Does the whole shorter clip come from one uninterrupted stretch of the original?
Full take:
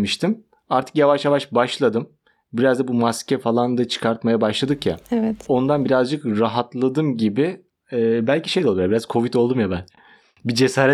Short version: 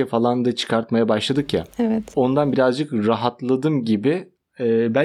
yes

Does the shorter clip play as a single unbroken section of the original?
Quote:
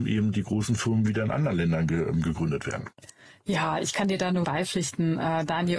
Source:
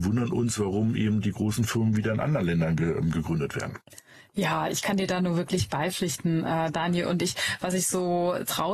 no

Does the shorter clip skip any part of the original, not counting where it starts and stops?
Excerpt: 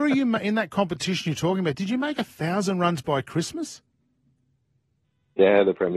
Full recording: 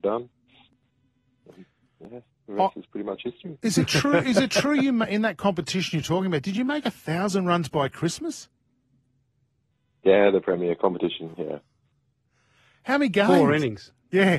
no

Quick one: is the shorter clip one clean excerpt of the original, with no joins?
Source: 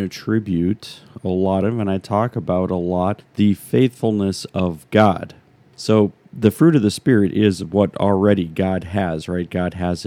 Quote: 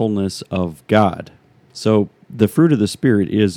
yes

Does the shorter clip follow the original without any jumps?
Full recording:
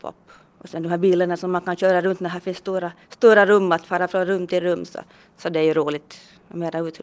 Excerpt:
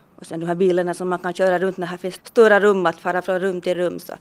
no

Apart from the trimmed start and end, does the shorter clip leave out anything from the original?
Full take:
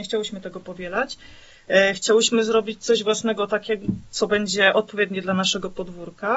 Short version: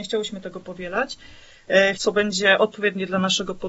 yes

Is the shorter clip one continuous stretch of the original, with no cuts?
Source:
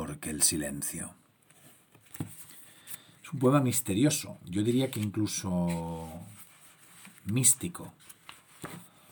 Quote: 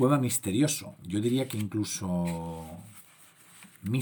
yes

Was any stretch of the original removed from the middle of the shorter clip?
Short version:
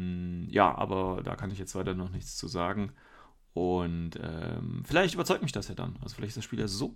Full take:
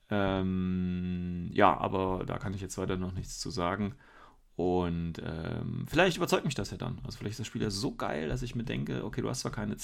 no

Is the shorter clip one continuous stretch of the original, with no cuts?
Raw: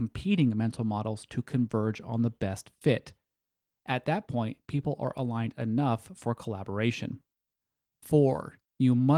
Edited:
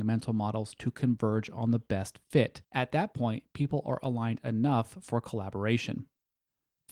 no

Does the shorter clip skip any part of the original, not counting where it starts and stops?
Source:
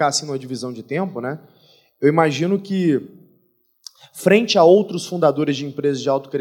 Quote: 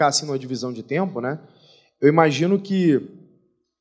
no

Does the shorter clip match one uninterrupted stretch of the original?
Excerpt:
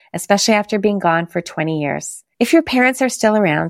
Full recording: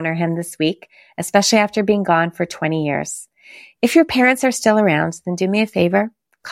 no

